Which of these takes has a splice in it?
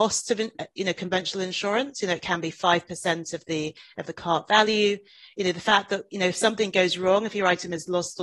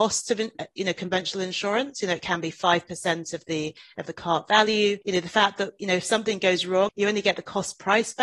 second; 2 cuts; at 5.0 s, 6.9 s

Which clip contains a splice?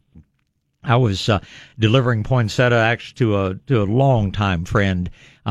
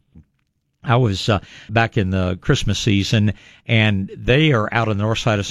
second; 1 cut; at 1.7 s

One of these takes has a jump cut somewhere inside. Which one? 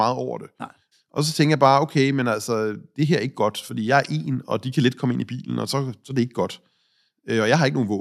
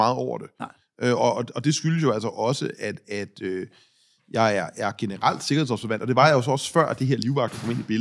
first; 1 cut; at 0.9 s

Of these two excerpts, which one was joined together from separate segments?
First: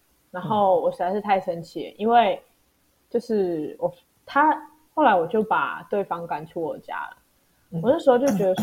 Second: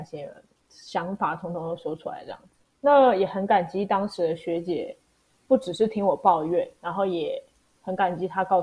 first; 1 cut; at 4.9 s

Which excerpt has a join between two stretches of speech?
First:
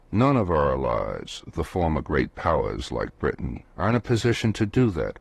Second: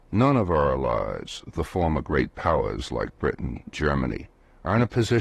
first; 1 cut; at 3.6 s

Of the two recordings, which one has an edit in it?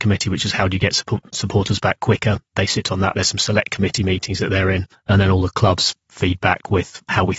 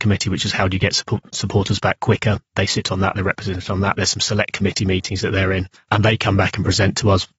first; 2 cuts; at 3.1 s, 4.9 s

